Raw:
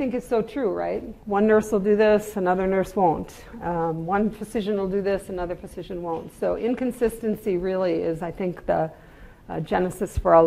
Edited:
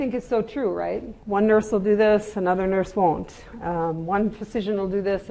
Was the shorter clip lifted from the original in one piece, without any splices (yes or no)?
yes